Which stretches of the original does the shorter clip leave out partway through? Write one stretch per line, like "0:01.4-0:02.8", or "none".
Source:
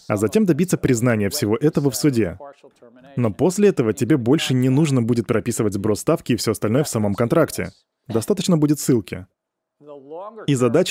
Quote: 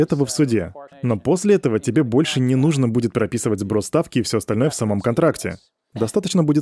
0:02.6-0:03.1